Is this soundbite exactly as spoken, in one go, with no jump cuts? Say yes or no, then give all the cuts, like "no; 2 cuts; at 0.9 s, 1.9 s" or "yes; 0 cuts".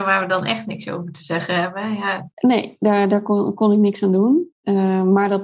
no; 1 cut; at 2.3 s